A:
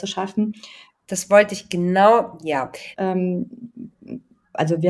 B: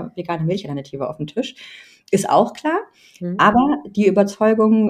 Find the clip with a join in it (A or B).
A